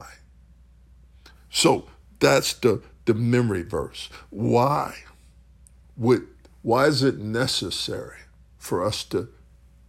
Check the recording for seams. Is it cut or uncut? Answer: uncut